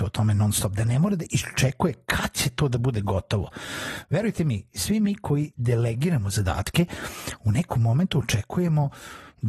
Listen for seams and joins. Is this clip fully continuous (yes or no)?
yes